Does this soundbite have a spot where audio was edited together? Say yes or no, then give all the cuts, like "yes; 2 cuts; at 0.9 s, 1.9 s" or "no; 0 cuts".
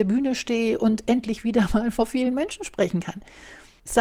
no; 0 cuts